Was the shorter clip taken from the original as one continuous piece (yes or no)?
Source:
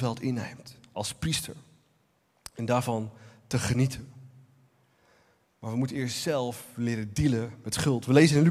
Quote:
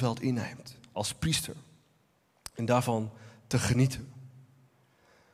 yes